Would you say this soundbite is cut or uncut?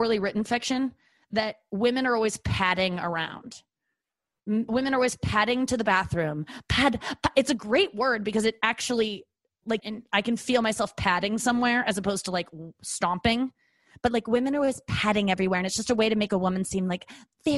cut